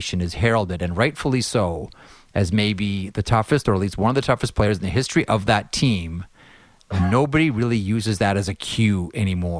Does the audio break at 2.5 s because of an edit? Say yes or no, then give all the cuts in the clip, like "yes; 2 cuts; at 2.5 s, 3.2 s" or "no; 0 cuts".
no; 0 cuts